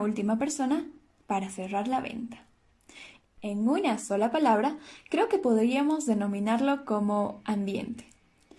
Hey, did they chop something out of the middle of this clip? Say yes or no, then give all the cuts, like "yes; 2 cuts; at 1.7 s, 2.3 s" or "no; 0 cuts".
yes; 1 cut; at 3.2 s